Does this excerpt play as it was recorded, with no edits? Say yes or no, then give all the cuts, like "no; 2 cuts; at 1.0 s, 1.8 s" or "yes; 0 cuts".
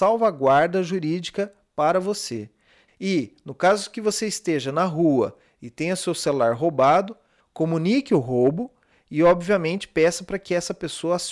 no; 2 cuts; at 2.9 s, 7.4 s